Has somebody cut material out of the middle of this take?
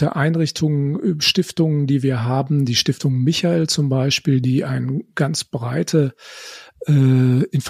no; 0 cuts

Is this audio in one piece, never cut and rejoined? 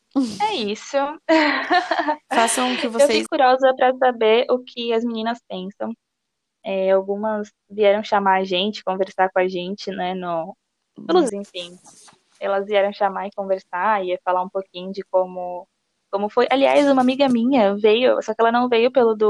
no; 2 cuts; at 3.3 s, 11.3 s

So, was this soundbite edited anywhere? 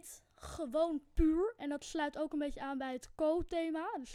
no; 0 cuts

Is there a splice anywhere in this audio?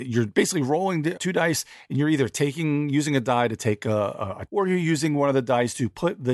yes; 2 cuts; at 1.2 s, 4.5 s

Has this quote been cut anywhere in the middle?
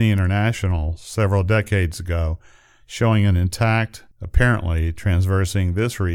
yes; 1 cut; at 4.1 s

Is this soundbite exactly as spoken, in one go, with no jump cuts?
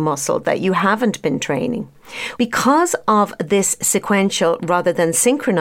no; 1 cut; at 2.4 s

